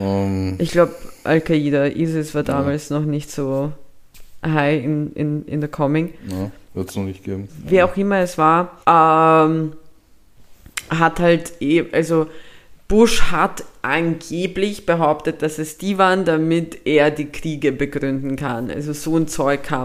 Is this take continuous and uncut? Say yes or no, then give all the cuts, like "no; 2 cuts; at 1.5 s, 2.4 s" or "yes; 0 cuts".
no; 2 cuts; at 7.5 s, 8.8 s